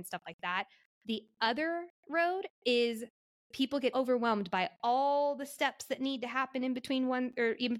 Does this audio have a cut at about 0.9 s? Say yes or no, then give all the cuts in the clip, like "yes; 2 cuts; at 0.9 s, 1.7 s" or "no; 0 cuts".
no; 1 cut; at 3.9 s